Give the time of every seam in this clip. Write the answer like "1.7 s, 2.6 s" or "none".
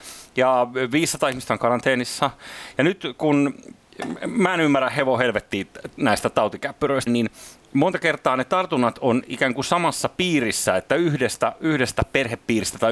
7.1 s